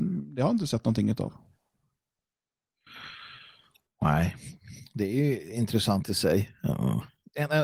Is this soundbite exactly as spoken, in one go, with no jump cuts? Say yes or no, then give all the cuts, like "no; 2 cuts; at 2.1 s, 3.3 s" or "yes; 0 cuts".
yes; 0 cuts